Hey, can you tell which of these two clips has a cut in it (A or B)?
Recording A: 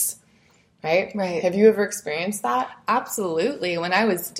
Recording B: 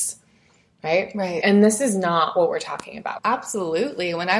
B